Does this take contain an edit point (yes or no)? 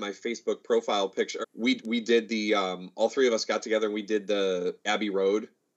yes